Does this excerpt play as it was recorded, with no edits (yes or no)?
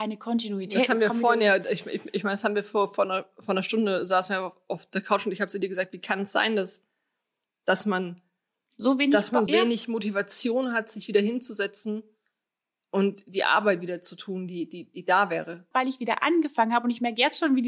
no